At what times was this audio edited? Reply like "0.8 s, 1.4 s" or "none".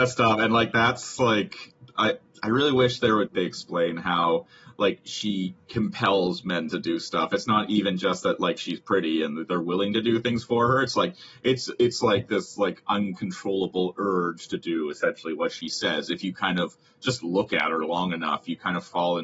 3.3 s

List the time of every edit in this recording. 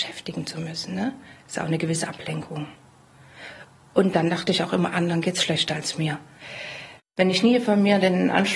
7.0 s

